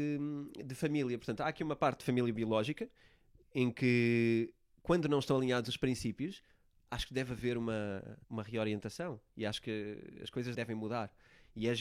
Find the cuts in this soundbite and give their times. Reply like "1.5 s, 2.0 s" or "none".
8.2 s, 10.5 s